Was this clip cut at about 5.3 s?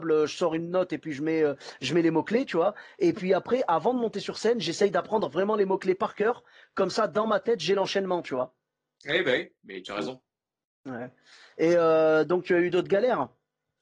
no; 0 cuts

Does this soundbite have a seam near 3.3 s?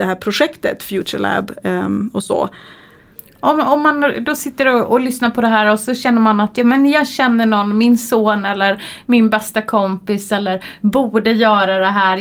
no; 0 cuts

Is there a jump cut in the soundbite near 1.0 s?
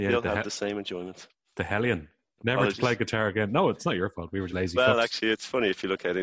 no; 2 cuts; at 2.4 s, 4.5 s

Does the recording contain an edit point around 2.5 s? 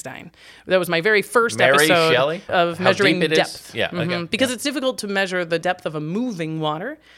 yes; 1 cut; at 2.5 s

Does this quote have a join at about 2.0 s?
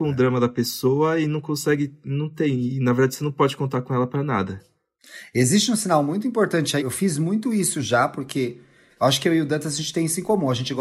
no; 1 cut; at 6.8 s

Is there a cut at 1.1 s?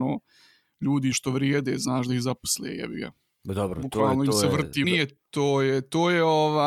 yes; 2 cuts; at 1.1 s, 4.8 s

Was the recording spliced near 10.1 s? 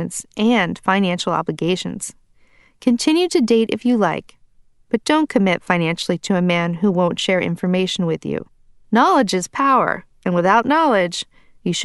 no; 1 cut; at 8.8 s

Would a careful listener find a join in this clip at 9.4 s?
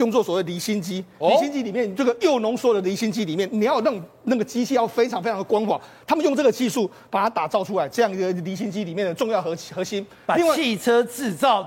no; 0 cuts

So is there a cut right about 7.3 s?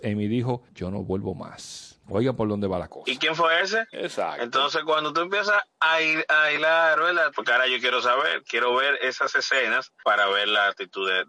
yes; 2 cuts; at 3.9 s, 7.3 s

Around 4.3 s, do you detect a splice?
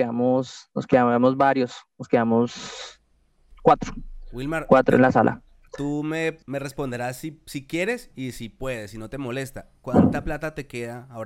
no; 1 cut; at 6.4 s

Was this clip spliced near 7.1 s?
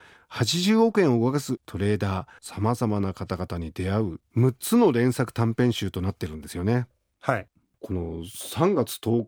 no; 1 cut; at 2.4 s

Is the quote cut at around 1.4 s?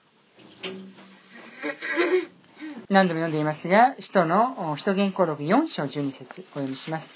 no; 1 cut; at 2.9 s

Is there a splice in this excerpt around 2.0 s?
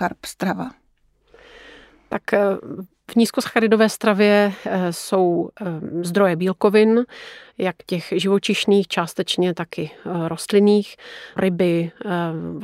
no; 1 cut; at 11.4 s

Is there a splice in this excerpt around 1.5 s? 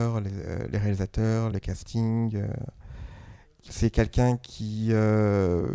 yes; 1 cut; at 1.5 s

